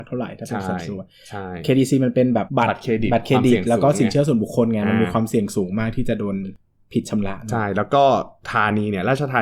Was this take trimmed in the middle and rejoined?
yes; 1 cut; at 2.5 s

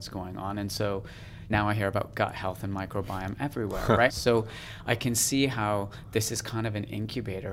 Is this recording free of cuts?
no; 2 cuts; at 1.5 s, 4.1 s

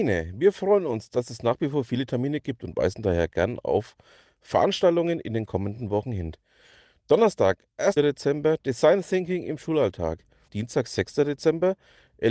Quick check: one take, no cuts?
no; 2 cuts; at 8.0 s, 10.5 s

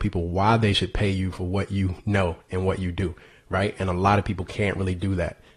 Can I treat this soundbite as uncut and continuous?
yes; 0 cuts

